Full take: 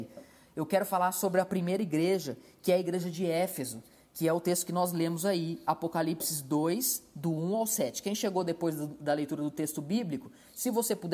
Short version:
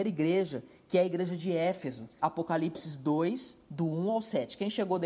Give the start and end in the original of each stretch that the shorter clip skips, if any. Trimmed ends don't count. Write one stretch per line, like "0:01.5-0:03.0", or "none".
0:03.9-0:05.7